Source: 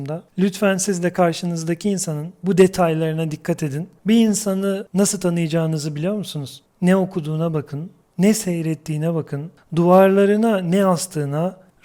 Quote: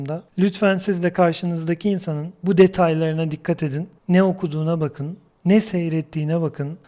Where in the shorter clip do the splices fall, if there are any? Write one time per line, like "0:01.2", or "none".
0:04.0